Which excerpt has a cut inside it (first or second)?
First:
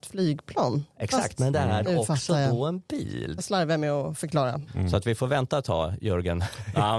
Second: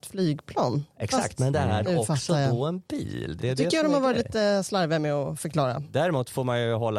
first